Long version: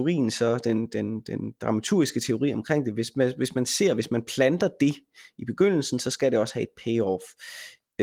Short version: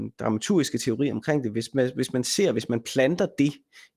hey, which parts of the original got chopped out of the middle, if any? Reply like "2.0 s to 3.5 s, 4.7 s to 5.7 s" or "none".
none